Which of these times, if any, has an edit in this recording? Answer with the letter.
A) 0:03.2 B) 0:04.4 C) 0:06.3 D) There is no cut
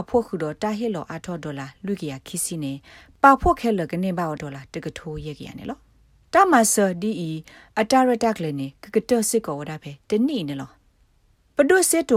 B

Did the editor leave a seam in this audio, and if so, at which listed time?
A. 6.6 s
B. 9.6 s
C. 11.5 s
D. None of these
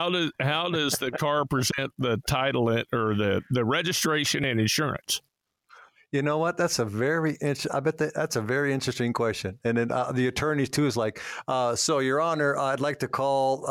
D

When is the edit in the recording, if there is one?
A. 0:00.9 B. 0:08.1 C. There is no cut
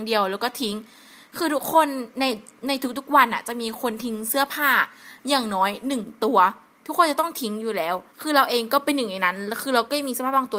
B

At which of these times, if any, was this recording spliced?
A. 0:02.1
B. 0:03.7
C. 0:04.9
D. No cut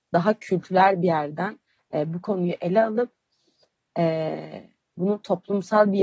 D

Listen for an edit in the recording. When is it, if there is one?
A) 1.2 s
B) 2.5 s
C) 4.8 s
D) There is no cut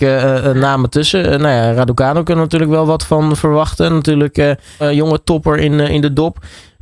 C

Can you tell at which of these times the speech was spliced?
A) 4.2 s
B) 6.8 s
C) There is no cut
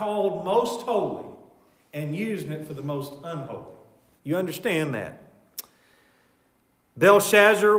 A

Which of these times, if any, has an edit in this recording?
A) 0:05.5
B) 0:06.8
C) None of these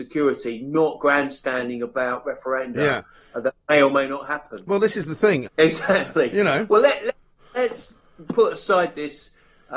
A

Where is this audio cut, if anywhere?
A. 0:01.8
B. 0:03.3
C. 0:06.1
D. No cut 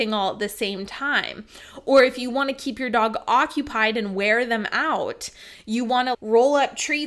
C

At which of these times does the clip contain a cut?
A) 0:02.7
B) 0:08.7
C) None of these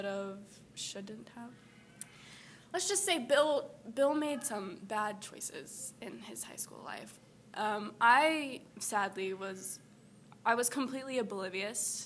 B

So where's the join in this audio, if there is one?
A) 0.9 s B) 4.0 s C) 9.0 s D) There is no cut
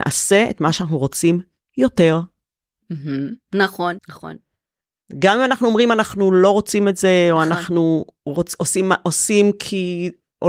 B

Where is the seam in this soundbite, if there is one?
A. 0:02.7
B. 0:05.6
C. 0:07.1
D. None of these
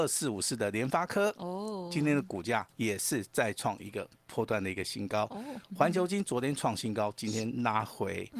A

